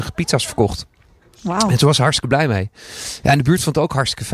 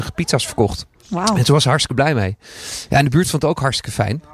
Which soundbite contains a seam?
second; 1 cut; at 1.0 s

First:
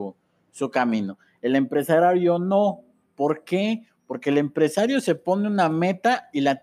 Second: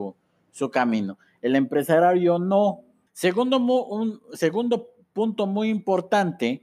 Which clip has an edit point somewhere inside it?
second; 1 cut; at 3.1 s

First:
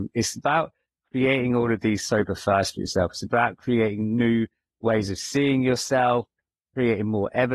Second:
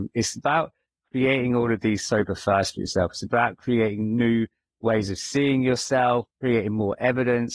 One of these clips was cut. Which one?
second; 1 cut; at 6.3 s

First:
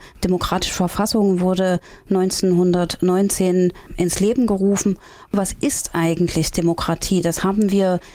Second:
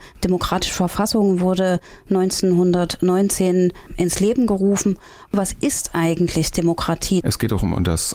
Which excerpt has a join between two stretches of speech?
second; 1 cut; at 7.2 s

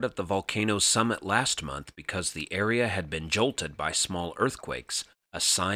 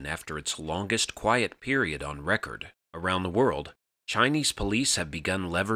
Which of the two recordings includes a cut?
second; 1 cut; at 2.9 s

